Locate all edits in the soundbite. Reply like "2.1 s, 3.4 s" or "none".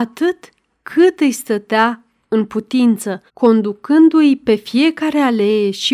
3.3 s

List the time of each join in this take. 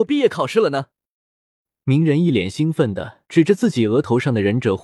3.3 s

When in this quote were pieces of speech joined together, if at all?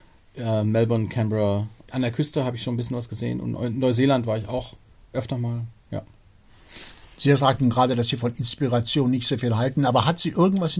1.9 s

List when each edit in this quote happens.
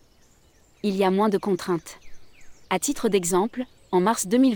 2.6 s

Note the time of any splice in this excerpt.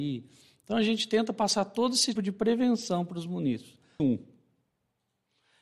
2.2 s, 4.0 s

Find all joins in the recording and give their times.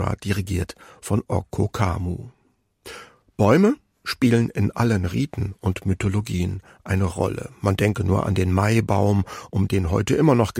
none

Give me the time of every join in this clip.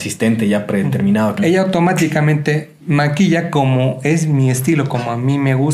1.4 s, 2.8 s

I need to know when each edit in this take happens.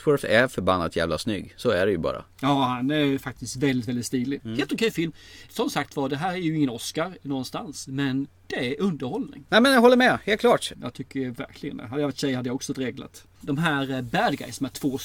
4.4 s, 10.7 s, 13.4 s

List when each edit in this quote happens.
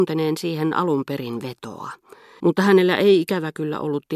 2.4 s

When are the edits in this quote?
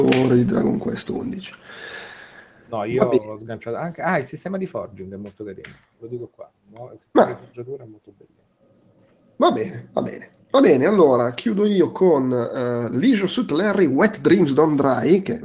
none

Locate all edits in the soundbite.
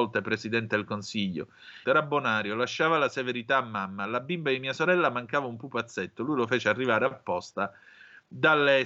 1.8 s

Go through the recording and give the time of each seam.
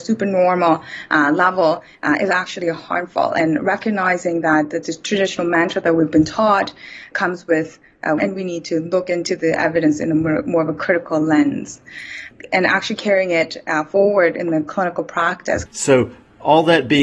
8.2 s, 15.7 s

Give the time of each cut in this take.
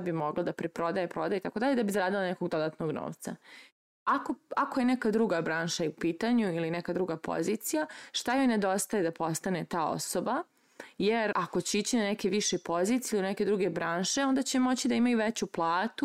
3.8 s, 11.3 s

